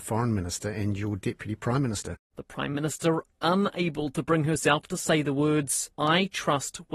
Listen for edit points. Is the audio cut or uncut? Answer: cut